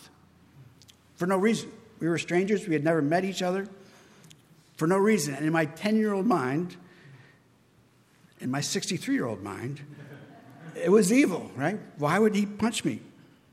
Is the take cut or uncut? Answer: uncut